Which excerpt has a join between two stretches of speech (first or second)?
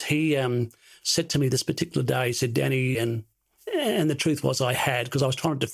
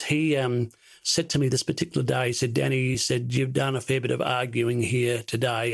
first